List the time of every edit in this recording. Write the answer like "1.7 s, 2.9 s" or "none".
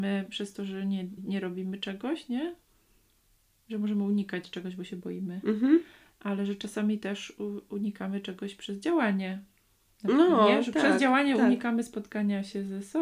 1.2 s